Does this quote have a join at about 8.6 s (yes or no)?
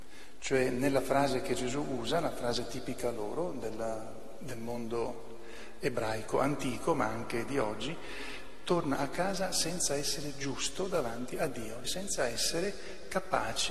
no